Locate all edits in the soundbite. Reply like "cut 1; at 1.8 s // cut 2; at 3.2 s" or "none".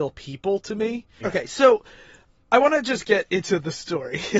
cut 1; at 1.2 s